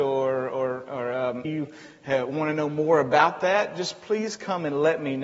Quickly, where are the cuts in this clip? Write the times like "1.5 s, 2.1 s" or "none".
1.4 s